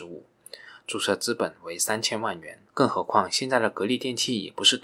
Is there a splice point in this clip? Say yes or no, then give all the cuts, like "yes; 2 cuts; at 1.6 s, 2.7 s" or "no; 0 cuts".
yes; 1 cut; at 2.7 s